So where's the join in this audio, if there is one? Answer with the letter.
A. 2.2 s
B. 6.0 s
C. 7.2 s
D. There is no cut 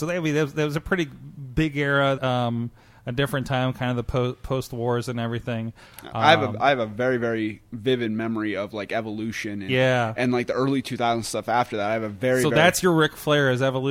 A